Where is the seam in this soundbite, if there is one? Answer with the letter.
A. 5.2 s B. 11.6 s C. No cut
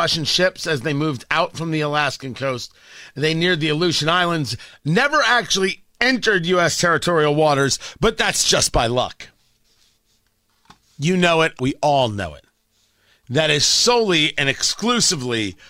B